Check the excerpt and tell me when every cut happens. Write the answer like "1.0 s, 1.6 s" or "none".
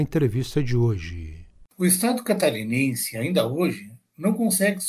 none